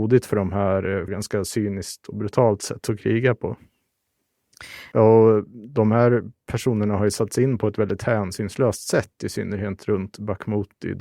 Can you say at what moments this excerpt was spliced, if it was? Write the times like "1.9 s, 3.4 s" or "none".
1.1 s, 4.9 s

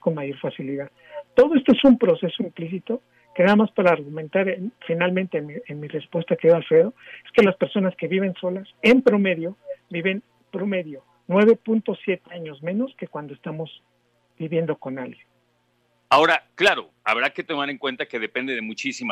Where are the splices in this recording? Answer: 16.1 s

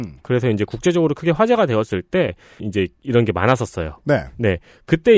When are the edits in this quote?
2.6 s

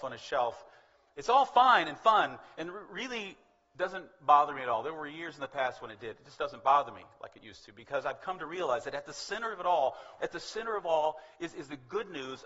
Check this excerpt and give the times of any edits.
10.2 s

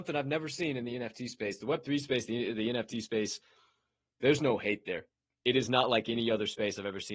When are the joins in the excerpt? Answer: none

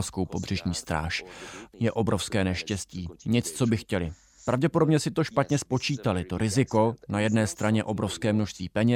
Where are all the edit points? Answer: 1.7 s

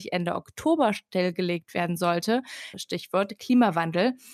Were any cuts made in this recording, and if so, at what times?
2.7 s

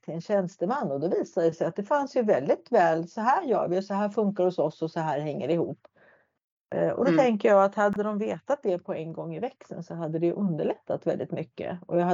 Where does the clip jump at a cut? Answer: none

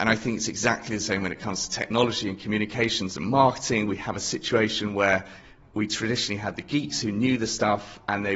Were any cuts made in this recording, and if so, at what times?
none

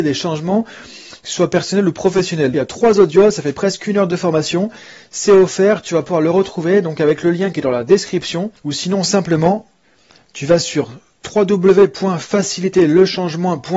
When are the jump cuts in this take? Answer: 2.5 s, 8.6 s

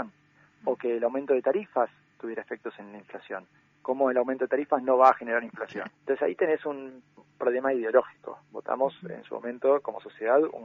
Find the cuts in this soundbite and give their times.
3.7 s, 5.9 s

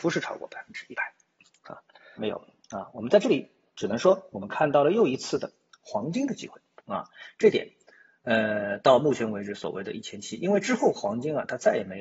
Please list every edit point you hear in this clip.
2.2 s

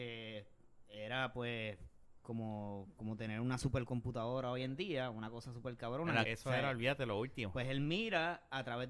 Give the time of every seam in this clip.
6.2 s

